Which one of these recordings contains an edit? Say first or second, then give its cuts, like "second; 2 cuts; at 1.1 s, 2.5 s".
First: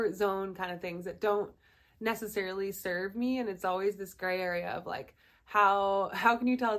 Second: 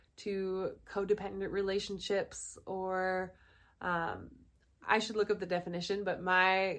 second; 1 cut; at 4.8 s